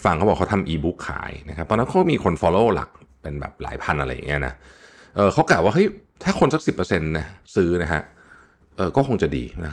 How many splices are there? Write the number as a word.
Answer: zero